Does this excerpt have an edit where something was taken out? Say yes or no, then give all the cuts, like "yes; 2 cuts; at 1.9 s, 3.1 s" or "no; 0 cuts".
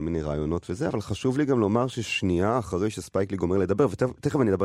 no; 0 cuts